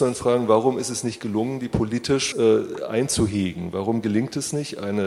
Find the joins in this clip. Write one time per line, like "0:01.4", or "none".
0:02.3

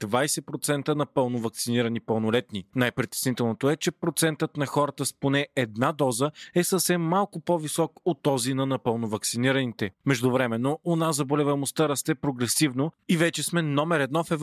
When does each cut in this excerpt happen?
0:02.7
0:09.9

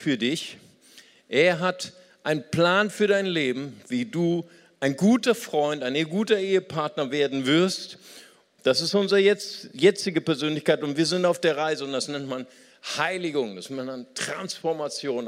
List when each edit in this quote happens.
0:08.6

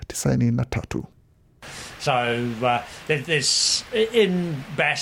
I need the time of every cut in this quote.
none

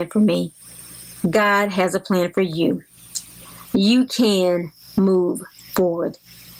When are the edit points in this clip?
none

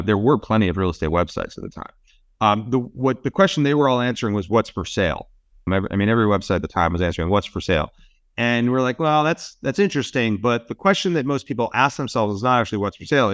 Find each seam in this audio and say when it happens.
0:05.7

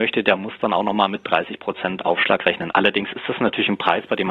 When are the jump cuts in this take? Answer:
0:02.7

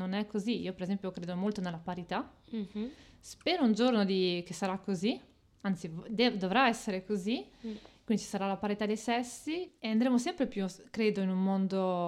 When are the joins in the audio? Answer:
none

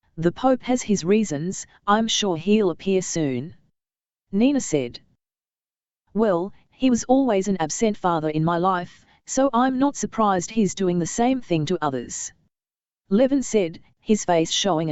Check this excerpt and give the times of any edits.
none

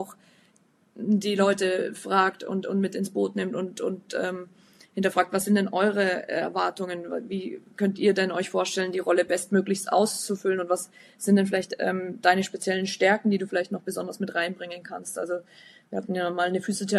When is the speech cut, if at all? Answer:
none

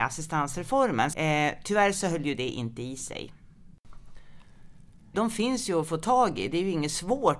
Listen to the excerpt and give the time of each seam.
0:01.1
0:05.1

